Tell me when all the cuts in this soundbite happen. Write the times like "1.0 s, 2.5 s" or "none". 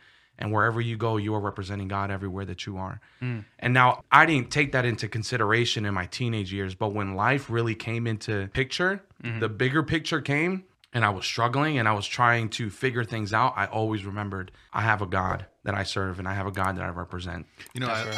none